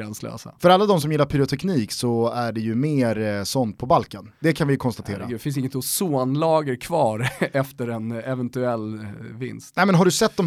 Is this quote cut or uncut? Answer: uncut